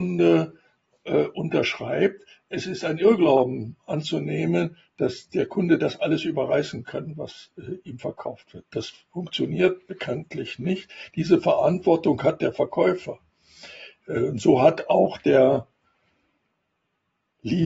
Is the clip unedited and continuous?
yes; 0 cuts

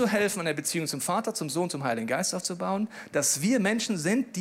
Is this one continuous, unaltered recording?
yes; 0 cuts

